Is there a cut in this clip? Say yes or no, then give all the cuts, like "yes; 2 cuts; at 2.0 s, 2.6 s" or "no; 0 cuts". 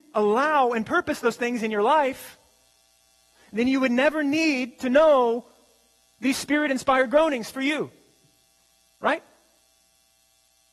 no; 0 cuts